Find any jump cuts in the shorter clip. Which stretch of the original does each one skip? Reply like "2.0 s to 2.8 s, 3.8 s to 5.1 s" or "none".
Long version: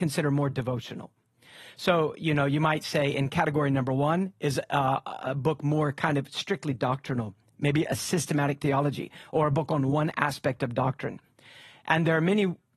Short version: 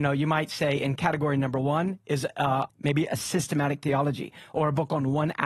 5.0 s to 7.5 s